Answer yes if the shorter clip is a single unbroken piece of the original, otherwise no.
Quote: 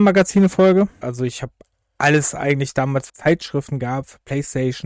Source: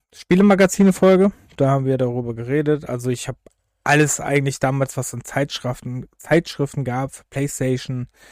no